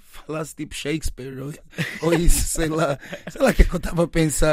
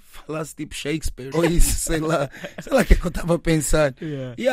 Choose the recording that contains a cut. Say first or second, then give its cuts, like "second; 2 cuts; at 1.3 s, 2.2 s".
second; 1 cut; at 1.3 s